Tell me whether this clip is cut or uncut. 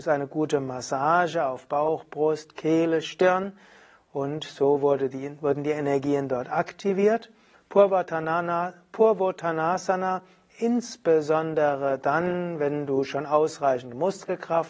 cut